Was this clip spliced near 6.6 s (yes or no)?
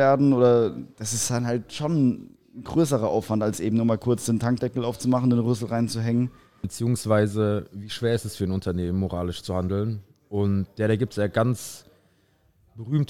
yes